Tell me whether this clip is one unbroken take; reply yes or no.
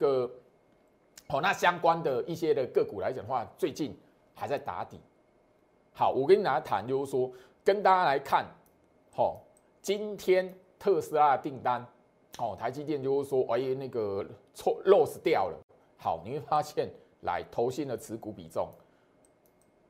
yes